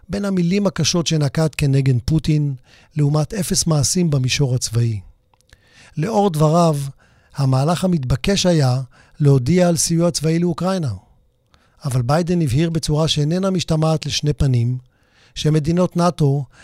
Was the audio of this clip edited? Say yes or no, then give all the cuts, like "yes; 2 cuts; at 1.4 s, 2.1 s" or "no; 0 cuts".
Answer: no; 0 cuts